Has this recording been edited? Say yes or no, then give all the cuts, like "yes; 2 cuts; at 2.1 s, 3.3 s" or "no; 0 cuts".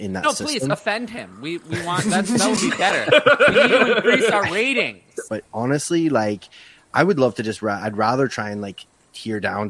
yes; 1 cut; at 5.3 s